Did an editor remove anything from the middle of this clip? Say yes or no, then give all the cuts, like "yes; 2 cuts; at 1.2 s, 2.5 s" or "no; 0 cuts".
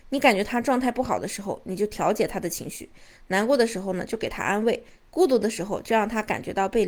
no; 0 cuts